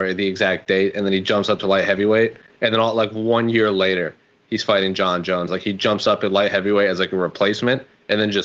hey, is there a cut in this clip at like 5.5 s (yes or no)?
yes